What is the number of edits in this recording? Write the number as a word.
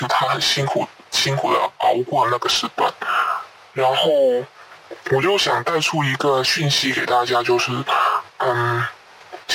zero